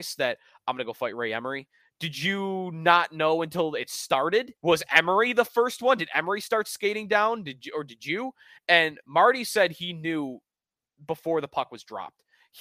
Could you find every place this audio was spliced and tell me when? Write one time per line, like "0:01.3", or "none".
0:04.6

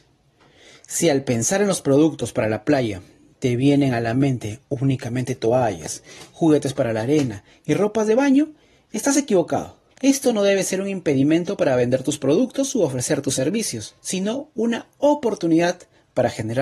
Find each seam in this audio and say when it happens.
0:09.9
0:14.0

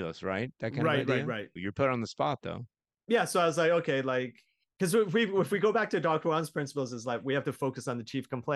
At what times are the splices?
0:01.6

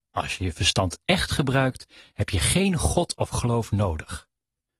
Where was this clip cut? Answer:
none

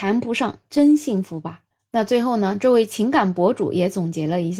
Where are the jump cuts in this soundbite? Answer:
none

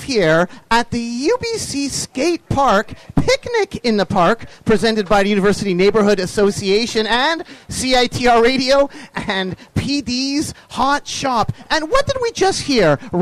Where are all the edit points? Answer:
none

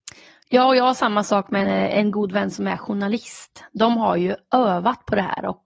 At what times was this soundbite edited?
0:01.6

